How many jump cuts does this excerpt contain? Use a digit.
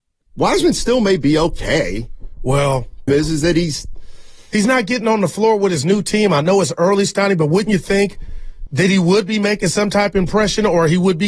2